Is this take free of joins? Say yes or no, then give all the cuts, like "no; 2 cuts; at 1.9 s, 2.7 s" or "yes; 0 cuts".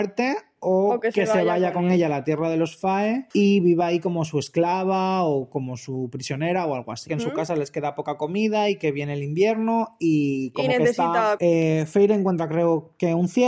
no; 2 cuts; at 7.1 s, 11.4 s